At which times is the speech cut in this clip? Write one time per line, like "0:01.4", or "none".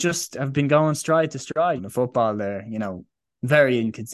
0:01.8